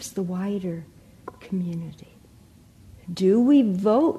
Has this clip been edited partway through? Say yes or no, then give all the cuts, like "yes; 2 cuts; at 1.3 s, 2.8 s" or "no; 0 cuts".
yes; 1 cut; at 3.0 s